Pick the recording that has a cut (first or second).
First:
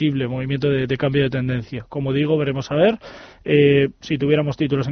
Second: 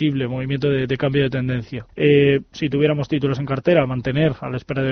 second